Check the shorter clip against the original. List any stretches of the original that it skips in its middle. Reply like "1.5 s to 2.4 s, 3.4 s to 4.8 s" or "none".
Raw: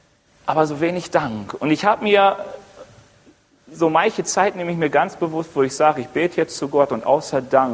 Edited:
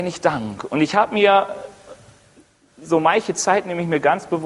none